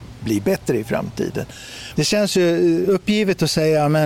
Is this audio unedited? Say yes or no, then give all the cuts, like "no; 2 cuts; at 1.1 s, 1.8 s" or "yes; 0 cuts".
no; 1 cut; at 2.0 s